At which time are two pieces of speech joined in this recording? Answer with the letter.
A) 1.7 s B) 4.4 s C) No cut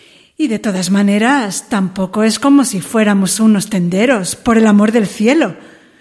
C